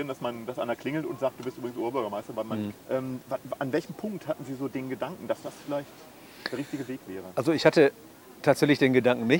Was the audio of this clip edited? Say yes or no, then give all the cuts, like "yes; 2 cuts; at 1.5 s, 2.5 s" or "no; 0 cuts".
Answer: yes; 1 cut; at 2.7 s